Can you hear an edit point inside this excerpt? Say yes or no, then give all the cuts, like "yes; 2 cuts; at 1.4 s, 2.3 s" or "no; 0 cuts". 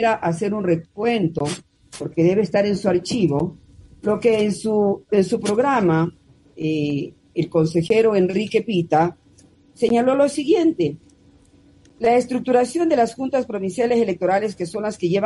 yes; 1 cut; at 5.1 s